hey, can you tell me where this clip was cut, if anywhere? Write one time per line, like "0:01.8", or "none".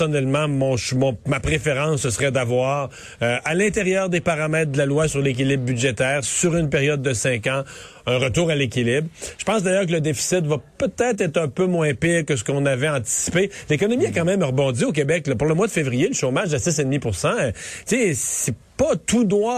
none